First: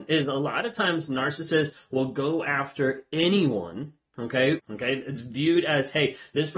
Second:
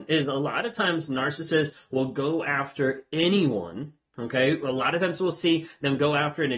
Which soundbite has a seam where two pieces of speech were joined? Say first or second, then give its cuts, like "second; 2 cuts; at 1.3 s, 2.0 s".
first; 1 cut; at 4.6 s